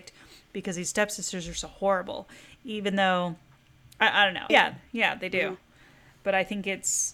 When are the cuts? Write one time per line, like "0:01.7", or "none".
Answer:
0:04.5